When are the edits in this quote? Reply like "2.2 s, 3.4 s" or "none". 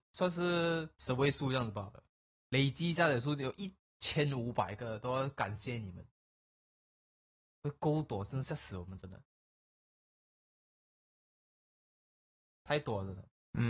2.4 s